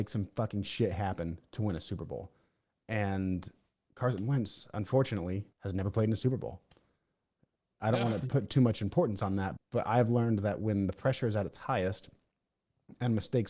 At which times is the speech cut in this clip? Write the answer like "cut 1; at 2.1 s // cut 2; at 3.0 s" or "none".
cut 1; at 5.5 s // cut 2; at 9.6 s